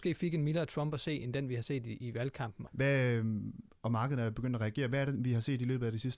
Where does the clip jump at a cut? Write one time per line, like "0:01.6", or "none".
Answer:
0:02.7

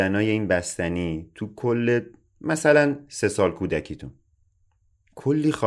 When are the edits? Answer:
none

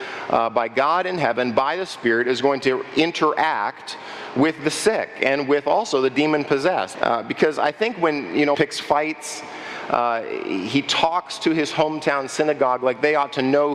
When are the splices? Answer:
0:06.9
0:08.5

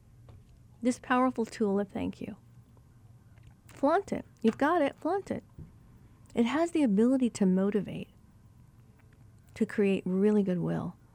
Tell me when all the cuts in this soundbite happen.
none

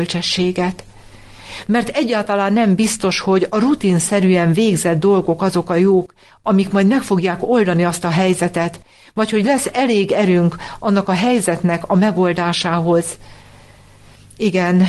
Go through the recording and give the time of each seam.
none

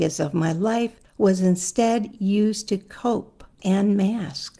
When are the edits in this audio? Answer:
0:03.6

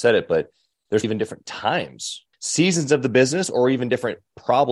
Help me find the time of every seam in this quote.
0:01.0
0:02.3

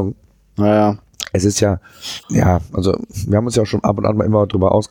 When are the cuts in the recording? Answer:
0:02.2

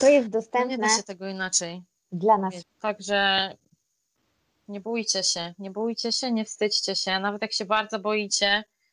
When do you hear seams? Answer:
0:02.6

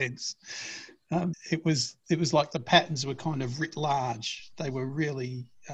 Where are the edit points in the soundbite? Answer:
0:01.3

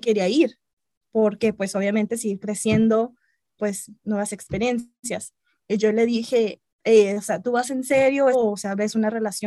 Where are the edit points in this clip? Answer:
0:03.6
0:08.3

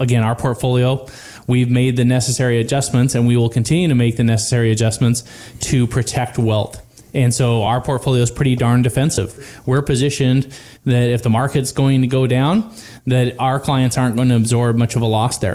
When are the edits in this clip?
none

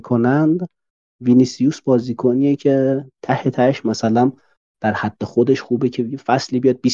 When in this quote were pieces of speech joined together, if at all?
none

